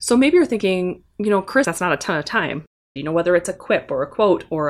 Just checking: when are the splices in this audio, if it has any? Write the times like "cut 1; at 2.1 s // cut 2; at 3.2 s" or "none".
cut 1; at 1.6 s // cut 2; at 3.0 s